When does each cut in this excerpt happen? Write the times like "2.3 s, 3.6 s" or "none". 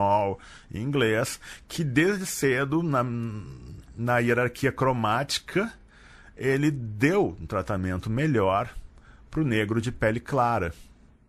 none